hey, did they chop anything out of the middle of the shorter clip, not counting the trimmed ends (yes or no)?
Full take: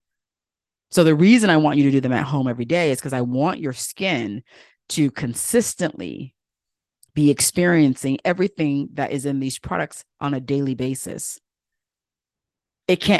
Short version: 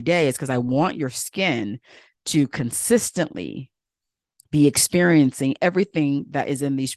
no